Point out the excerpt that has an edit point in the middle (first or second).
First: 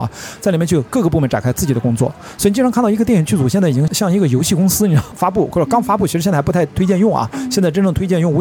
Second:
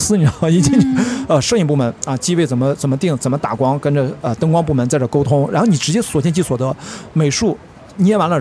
first